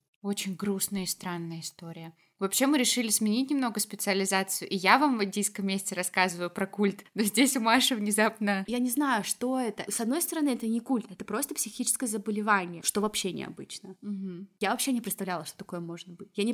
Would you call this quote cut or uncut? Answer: cut